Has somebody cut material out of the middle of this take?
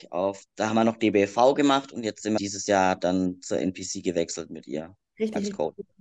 yes; 2 cuts; at 2.4 s, 5.0 s

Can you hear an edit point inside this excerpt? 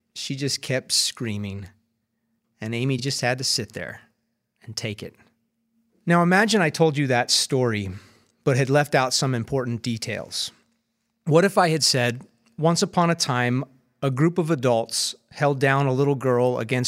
no; 0 cuts

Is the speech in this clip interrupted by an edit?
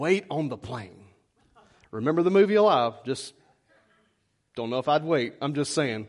no; 0 cuts

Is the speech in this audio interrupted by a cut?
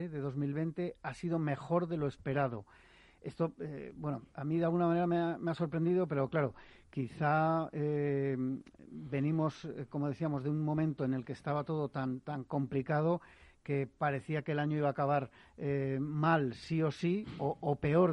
no; 0 cuts

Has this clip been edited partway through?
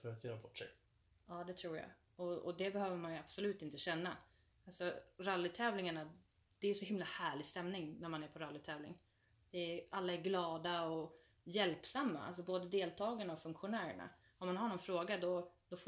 no; 0 cuts

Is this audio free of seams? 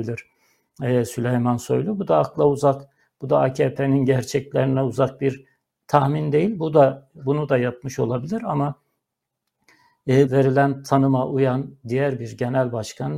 no; 1 cut; at 10.3 s

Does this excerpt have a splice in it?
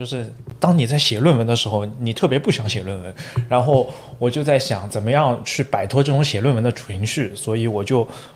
no; 0 cuts

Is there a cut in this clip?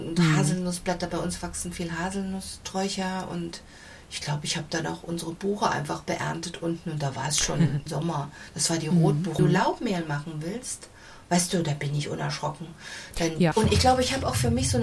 yes; 2 cuts; at 9.4 s, 13.5 s

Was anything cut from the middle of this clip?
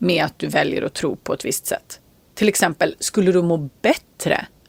no; 0 cuts

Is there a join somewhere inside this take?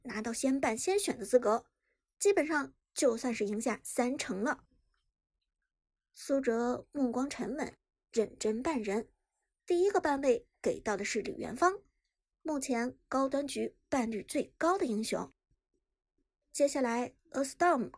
no; 0 cuts

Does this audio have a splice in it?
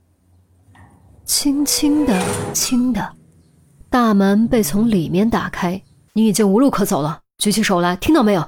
yes; 2 cuts; at 2.5 s, 6.1 s

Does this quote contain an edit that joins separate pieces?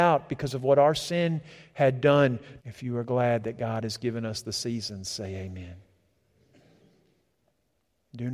yes; 1 cut; at 2.6 s

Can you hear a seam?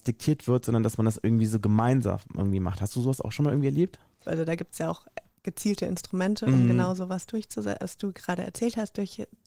yes; 2 cuts; at 4.2 s, 7.8 s

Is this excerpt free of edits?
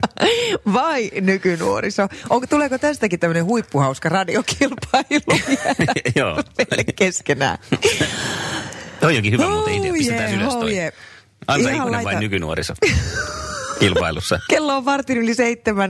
yes; 0 cuts

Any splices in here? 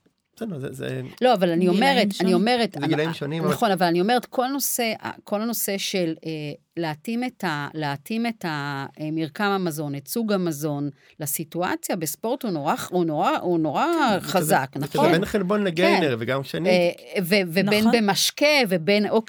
no; 0 cuts

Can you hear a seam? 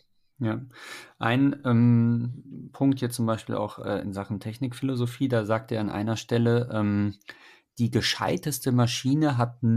no; 0 cuts

